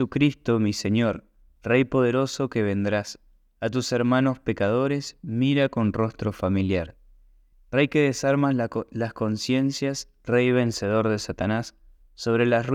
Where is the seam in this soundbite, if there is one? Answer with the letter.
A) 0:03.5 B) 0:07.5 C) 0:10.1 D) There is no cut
B